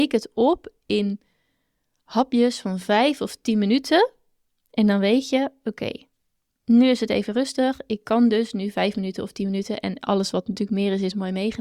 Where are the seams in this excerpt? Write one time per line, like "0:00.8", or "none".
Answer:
none